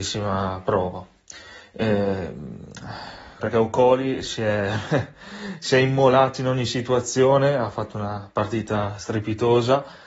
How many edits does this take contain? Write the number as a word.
one